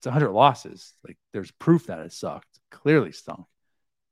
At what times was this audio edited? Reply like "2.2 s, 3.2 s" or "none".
2.6 s